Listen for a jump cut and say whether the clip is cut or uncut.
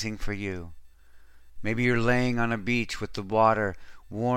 cut